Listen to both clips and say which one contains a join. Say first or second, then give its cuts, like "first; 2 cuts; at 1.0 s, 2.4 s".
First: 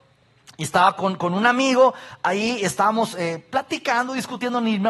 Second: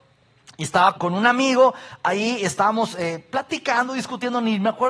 second; 1 cut; at 1.0 s